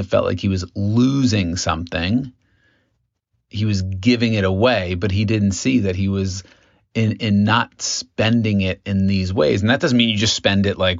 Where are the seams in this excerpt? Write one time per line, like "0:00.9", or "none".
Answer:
none